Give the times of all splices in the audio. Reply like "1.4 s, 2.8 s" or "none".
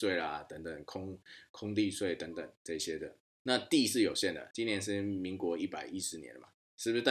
3.4 s, 4.5 s

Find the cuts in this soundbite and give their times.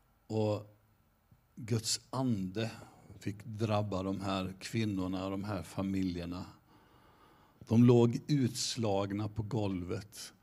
none

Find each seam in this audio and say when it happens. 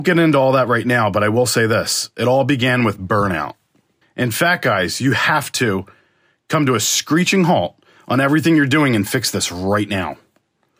4.0 s

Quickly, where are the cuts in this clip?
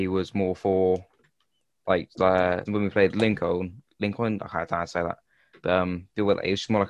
2.7 s

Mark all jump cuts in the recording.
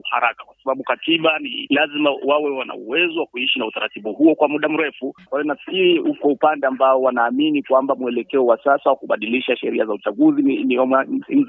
1.7 s, 5.3 s

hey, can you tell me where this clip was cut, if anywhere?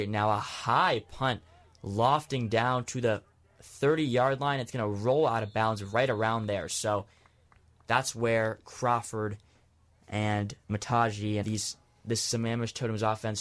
11.4 s

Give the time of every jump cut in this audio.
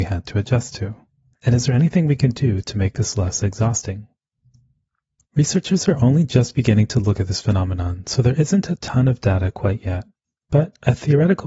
1.3 s

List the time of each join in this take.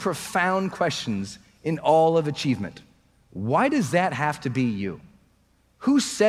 none

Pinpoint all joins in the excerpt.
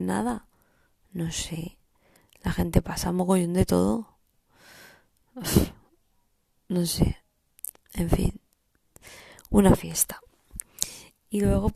none

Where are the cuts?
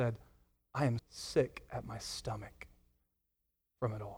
1.0 s

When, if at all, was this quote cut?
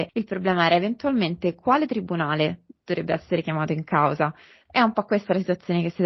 4.7 s

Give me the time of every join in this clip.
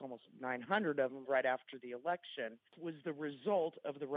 1.2 s, 2.7 s

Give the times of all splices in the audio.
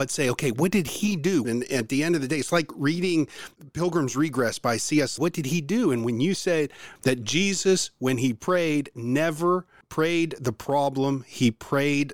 1.4 s, 5.2 s

